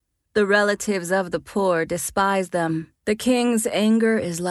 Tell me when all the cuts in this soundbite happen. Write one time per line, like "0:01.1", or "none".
0:03.0